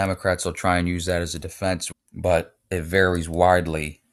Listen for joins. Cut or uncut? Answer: cut